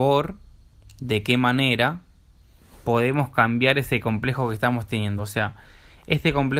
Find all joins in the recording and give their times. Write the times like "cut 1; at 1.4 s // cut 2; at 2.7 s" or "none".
none